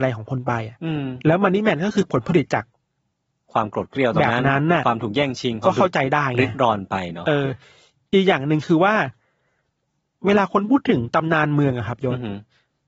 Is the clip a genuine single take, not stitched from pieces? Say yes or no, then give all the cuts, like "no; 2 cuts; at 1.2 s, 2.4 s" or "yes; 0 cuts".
yes; 0 cuts